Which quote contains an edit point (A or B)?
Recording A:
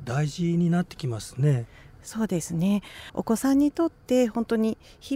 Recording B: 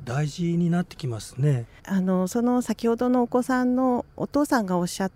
B